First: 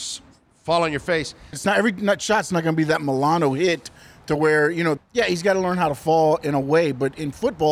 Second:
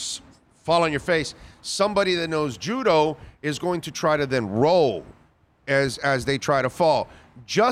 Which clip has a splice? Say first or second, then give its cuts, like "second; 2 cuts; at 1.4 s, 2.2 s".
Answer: first; 2 cuts; at 1.5 s, 5.0 s